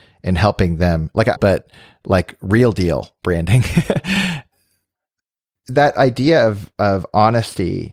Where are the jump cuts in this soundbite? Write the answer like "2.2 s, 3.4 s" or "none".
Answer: 1.4 s